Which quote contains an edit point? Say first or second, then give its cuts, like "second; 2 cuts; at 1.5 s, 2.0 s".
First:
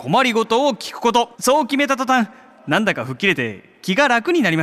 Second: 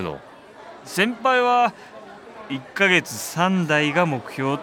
first; 1 cut; at 1.3 s